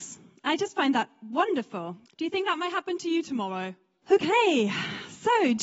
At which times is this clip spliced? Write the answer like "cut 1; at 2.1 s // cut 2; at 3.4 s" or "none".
cut 1; at 2.1 s // cut 2; at 4.0 s